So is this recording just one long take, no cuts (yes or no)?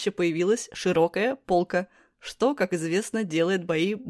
yes